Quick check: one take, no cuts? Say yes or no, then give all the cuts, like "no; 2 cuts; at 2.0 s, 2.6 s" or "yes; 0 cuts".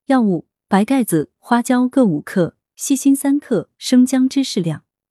yes; 0 cuts